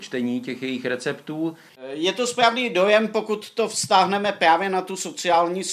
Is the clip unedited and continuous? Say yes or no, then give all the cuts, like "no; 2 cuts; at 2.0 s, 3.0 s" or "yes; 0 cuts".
no; 1 cut; at 1.7 s